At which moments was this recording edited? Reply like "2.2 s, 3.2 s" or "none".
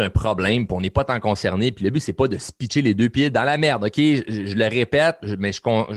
none